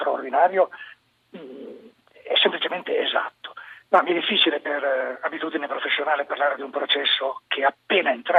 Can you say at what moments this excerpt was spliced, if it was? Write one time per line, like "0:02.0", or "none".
0:03.8